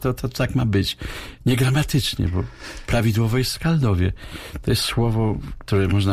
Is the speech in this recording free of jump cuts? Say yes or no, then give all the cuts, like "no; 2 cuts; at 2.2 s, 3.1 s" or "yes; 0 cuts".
yes; 0 cuts